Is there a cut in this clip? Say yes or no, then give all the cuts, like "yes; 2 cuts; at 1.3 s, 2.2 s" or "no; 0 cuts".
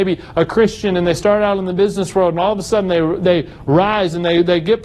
no; 0 cuts